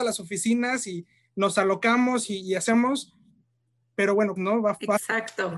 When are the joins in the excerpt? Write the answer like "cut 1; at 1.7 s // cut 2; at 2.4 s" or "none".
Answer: cut 1; at 4.4 s